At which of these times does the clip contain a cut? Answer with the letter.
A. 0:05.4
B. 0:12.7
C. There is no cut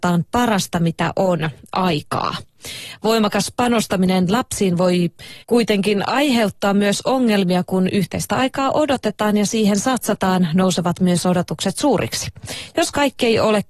A